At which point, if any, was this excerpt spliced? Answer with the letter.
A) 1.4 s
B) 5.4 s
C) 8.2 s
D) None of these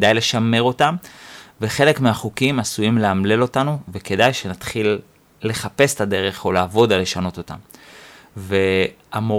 D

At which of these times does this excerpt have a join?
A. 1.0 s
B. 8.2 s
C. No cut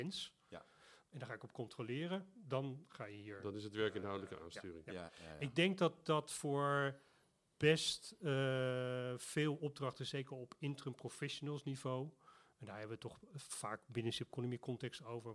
A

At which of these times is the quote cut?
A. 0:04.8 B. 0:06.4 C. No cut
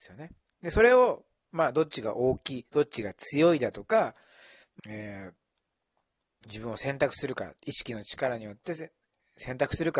A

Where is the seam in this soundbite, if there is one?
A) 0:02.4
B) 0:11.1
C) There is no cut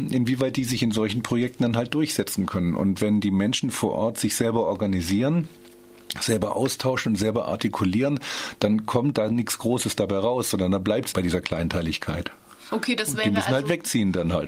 B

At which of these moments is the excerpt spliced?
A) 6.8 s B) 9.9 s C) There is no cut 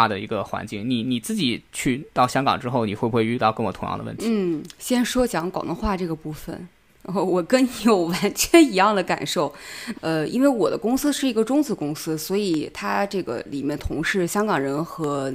B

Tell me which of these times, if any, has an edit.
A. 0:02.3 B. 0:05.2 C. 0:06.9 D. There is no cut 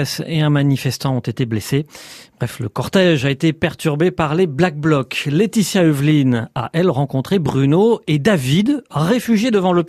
D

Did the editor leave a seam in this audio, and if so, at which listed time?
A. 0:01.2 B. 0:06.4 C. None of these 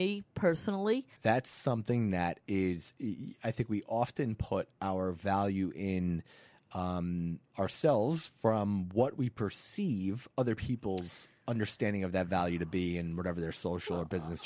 A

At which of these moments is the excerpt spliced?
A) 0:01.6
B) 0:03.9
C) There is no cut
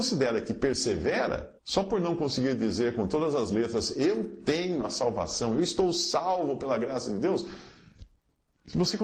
A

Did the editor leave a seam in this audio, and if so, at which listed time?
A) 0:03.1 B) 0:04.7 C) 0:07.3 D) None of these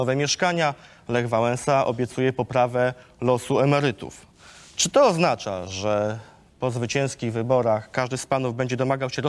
D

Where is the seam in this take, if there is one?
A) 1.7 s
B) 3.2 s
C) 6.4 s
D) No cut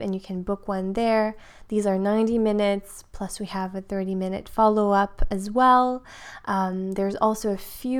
D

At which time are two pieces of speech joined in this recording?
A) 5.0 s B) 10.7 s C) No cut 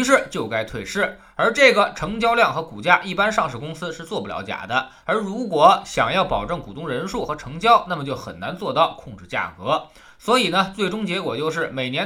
A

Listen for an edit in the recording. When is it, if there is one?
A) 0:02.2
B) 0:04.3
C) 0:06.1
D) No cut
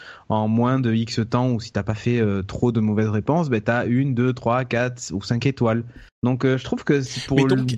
C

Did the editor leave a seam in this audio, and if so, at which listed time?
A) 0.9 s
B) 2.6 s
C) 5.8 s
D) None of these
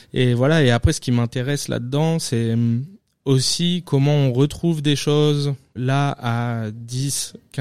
C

